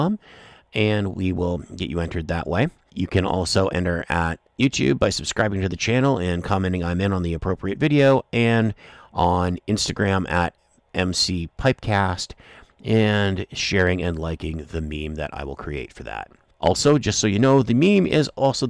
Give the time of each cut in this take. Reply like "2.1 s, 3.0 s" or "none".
none